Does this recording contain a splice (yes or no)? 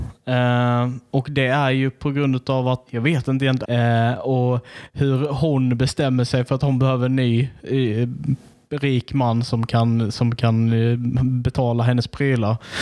yes